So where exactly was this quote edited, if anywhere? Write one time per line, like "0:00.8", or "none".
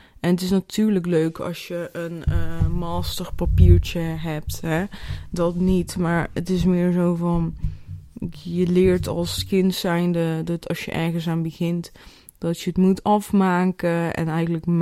none